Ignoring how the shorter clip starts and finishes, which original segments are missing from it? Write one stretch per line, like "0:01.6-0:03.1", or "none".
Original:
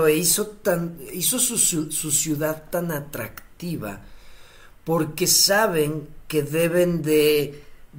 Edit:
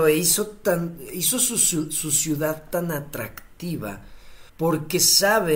0:04.5-0:04.8